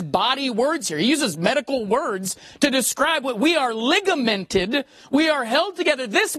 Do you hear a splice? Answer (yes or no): no